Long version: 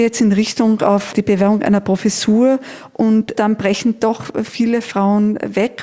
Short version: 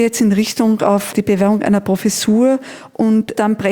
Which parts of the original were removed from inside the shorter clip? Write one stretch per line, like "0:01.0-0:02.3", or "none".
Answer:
none